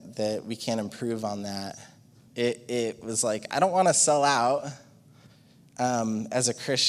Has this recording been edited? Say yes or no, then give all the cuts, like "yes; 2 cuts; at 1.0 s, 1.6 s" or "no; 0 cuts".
yes; 1 cut; at 2.3 s